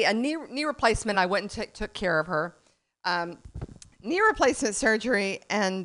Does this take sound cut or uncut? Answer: uncut